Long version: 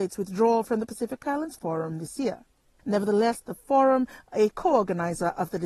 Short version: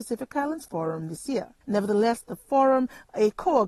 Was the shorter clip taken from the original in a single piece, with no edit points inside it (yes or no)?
no